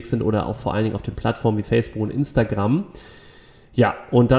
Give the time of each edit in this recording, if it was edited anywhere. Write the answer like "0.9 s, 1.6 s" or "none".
none